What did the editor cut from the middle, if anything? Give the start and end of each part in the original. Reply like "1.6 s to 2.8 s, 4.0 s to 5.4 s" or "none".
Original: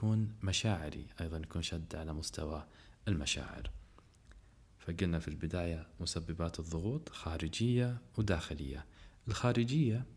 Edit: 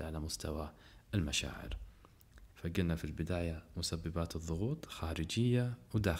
4.5 s to 4.8 s